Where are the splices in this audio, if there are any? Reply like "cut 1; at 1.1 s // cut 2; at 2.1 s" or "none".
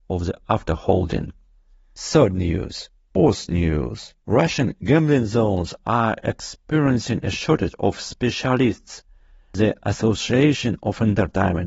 cut 1; at 3.1 s // cut 2; at 4.2 s